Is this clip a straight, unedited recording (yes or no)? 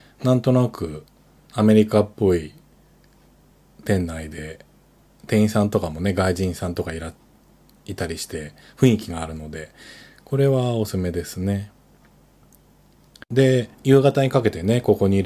no